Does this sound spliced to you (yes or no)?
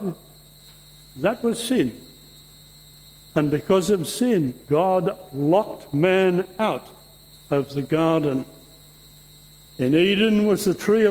yes